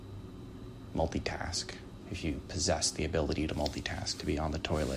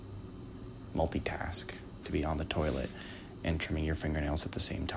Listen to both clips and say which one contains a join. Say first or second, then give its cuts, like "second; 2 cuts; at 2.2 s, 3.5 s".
second; 1 cut; at 2.0 s